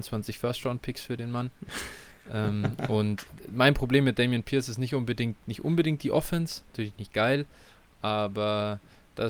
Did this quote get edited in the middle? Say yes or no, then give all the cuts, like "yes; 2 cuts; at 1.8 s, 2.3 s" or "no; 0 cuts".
no; 0 cuts